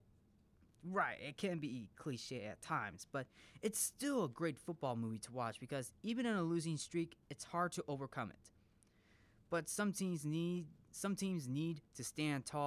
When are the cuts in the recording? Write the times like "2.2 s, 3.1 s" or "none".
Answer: none